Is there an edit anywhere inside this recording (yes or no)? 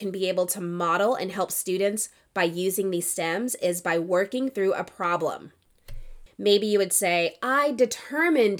yes